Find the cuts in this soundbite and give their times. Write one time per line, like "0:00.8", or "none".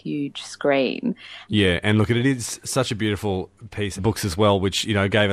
0:01.5
0:04.0